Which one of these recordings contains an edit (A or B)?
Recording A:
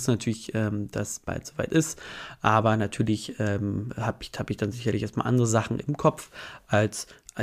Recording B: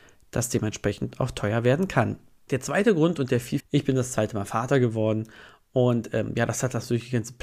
B